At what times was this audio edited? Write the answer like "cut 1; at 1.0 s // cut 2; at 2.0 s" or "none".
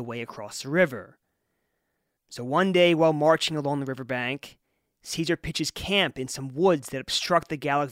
none